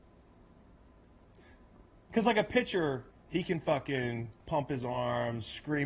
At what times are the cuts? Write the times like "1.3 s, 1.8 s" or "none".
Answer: 3.1 s, 4.4 s